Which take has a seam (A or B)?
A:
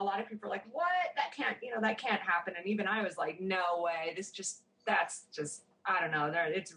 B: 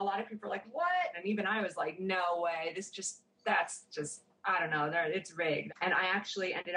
B